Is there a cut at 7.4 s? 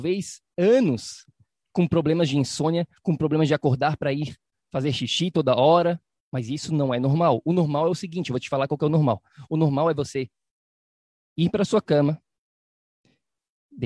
no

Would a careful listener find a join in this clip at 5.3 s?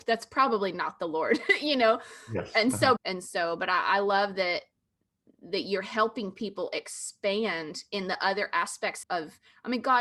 no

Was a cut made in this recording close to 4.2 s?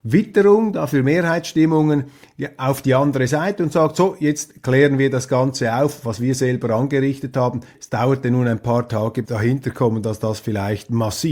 no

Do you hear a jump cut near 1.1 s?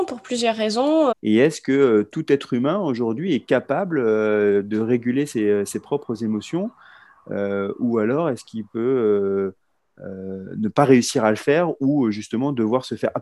yes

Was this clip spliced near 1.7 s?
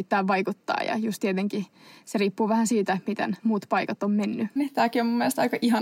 no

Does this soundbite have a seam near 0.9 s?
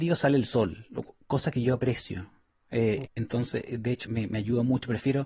no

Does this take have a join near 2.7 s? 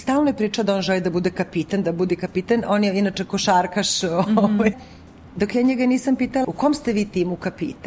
no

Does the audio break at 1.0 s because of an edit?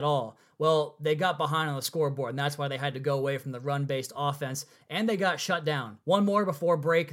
no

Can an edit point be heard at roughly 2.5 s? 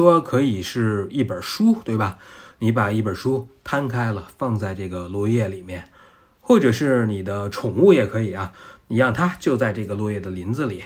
no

